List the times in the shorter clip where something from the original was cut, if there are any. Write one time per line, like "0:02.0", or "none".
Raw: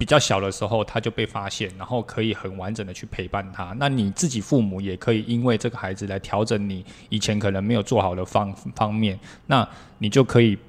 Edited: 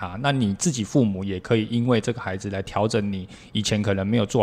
none